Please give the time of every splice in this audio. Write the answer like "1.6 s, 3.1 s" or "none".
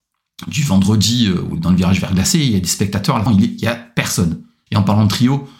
3.3 s, 4.7 s